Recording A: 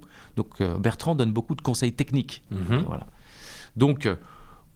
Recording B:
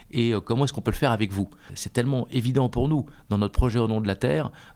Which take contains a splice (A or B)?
B